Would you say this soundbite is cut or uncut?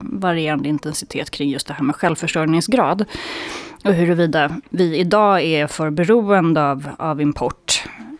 uncut